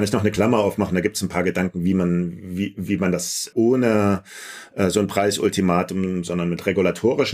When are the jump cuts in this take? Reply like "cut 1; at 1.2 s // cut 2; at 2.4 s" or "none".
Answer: cut 1; at 3.5 s